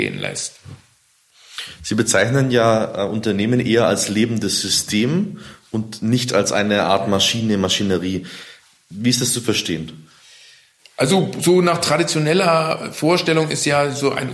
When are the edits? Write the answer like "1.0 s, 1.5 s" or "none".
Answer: none